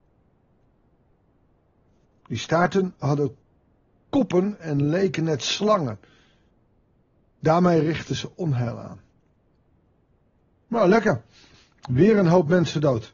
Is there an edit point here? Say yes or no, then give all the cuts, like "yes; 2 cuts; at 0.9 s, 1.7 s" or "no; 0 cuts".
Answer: no; 0 cuts